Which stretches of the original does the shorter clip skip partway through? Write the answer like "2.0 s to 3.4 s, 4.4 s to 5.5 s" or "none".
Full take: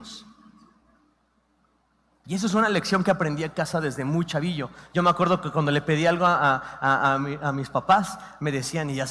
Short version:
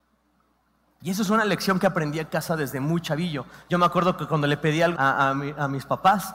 6.2 s to 6.8 s